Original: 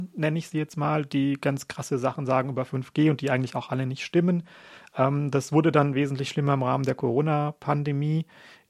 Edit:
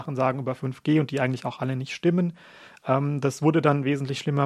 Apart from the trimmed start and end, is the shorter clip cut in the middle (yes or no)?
no